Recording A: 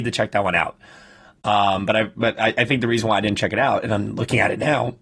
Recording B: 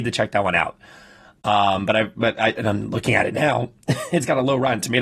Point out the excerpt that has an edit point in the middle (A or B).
B